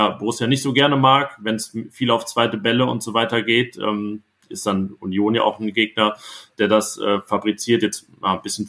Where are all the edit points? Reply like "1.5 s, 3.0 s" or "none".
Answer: none